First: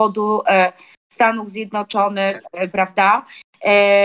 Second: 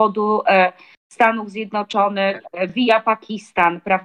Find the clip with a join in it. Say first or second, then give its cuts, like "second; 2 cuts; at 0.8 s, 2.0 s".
first; 1 cut; at 2.7 s